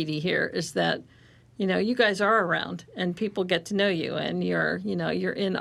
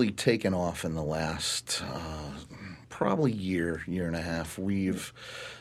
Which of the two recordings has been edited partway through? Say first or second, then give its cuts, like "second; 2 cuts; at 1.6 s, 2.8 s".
second; 1 cut; at 2.8 s